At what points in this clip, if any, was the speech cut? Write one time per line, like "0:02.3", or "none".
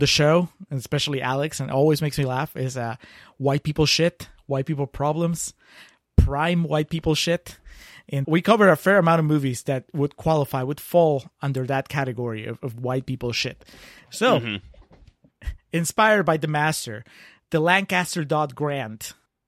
0:08.2